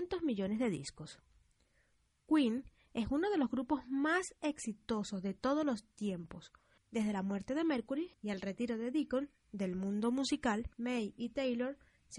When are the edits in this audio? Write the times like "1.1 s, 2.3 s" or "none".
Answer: 6.8 s, 8.1 s, 10.7 s